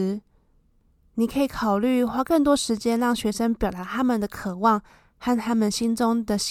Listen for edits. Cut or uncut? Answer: uncut